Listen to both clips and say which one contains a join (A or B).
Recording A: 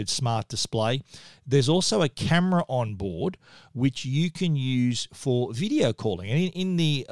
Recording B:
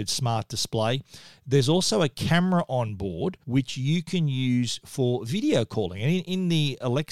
B